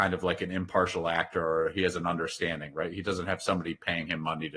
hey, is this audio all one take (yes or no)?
yes